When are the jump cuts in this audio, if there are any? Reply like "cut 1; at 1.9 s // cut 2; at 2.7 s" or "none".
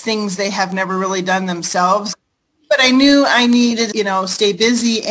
cut 1; at 2.1 s // cut 2; at 3.9 s